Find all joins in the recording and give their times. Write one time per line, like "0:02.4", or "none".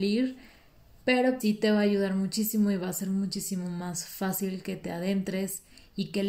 0:01.4